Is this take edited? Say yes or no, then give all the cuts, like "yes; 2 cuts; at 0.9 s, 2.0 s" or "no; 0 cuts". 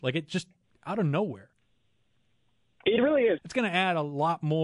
yes; 1 cut; at 3.4 s